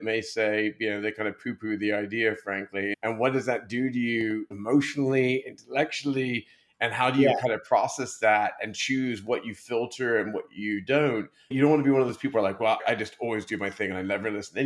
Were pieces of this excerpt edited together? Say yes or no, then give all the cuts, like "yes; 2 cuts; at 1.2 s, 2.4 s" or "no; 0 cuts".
no; 0 cuts